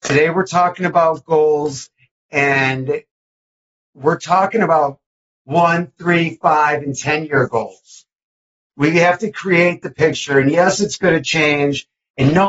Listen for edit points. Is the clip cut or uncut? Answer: uncut